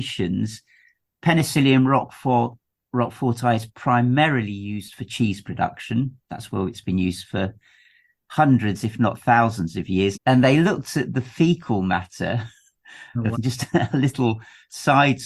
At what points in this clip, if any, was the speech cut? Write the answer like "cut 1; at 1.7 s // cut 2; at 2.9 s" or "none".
cut 1; at 10.2 s // cut 2; at 13.3 s